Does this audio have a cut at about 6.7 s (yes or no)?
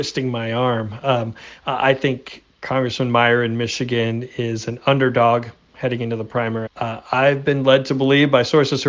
yes